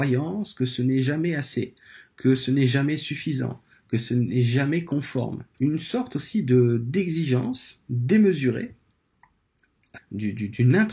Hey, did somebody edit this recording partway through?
yes; 2 cuts; at 5.5 s, 10.0 s

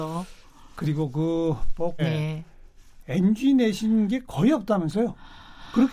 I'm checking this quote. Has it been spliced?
yes; 1 cut; at 2.0 s

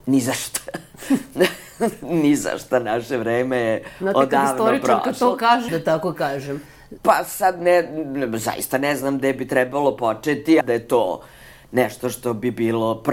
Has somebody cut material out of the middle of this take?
yes; 3 cuts; at 5.7 s, 7.0 s, 10.6 s

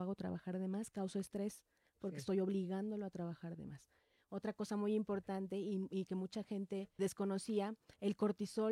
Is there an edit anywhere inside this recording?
yes; 1 cut; at 7.0 s

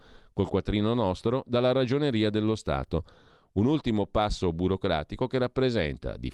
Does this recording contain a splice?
no; 0 cuts

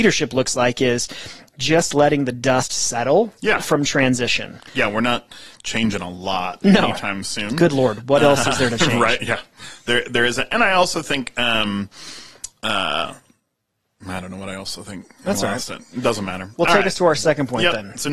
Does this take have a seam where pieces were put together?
no; 0 cuts

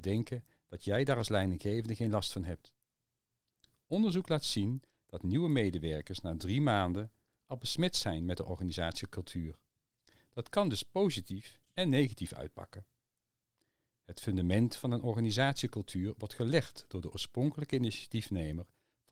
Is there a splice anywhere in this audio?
no; 0 cuts

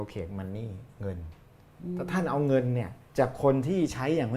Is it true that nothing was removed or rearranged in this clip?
no; 1 cut; at 3.1 s

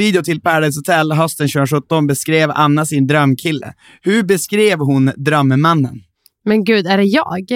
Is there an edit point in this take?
no; 0 cuts

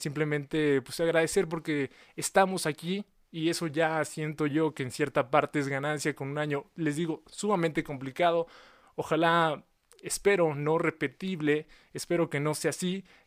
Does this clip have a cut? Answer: no; 0 cuts

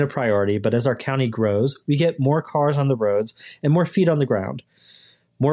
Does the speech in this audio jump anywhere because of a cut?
no; 0 cuts

